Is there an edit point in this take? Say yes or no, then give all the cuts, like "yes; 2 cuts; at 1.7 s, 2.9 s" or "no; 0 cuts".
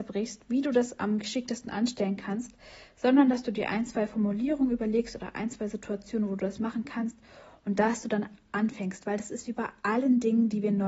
yes; 1 cut; at 8.5 s